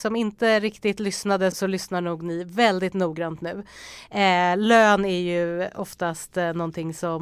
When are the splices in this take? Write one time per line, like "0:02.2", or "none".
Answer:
0:01.5